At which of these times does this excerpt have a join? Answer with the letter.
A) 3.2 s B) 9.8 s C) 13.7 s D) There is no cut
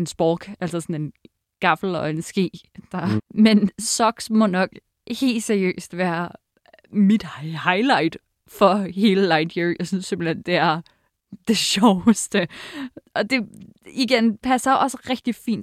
A